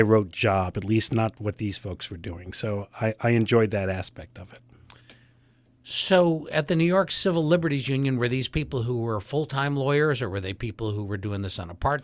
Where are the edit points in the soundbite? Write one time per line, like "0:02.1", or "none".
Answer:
none